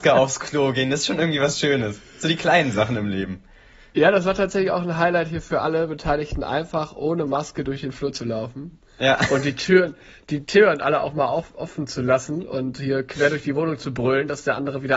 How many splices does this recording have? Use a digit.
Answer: 0